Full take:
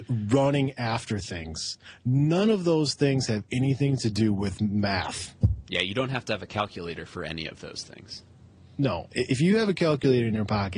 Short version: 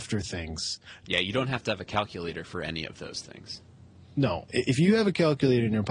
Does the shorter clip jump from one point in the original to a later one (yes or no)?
yes